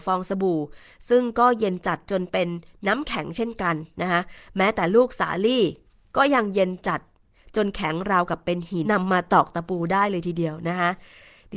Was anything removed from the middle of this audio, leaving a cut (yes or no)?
yes